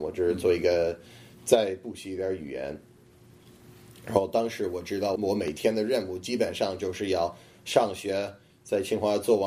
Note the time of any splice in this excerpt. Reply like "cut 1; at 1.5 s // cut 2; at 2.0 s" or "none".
cut 1; at 5.2 s